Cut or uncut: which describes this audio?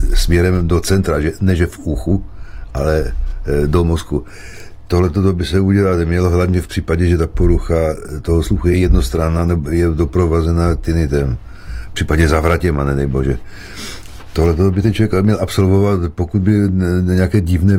uncut